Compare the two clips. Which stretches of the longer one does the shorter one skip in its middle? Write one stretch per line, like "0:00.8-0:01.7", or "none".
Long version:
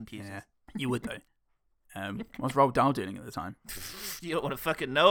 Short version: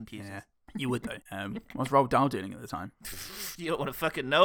0:01.2-0:01.9